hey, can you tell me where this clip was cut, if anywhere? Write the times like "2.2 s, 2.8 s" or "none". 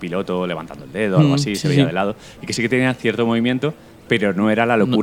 none